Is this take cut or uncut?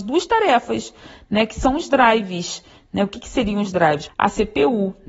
cut